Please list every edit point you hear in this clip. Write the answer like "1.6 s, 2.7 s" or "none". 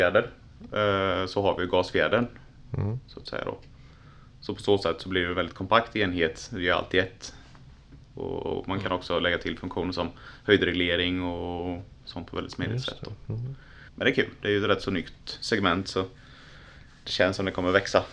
13.9 s